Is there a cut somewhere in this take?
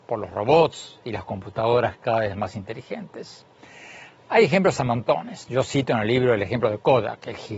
no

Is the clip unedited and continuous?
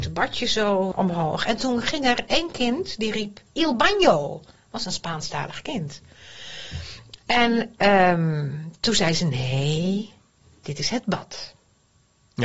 no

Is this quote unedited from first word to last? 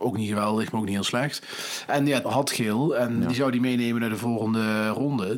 no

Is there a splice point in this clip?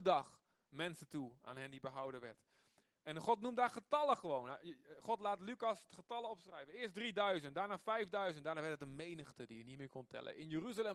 no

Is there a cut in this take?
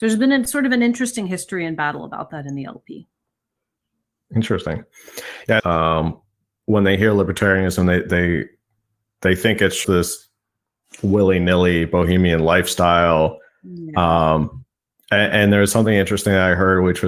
yes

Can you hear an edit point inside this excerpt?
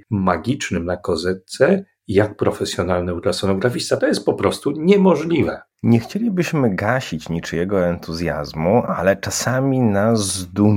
no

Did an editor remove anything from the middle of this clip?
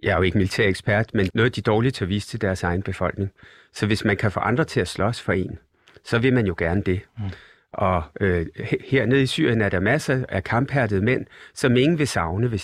yes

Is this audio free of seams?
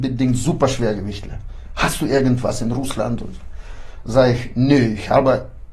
yes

